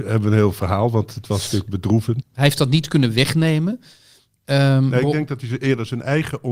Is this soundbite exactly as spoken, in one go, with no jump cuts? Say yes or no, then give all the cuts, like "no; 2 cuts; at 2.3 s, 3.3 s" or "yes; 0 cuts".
no; 1 cut; at 2.2 s